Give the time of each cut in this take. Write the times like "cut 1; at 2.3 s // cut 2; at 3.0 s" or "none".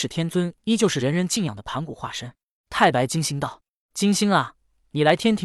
none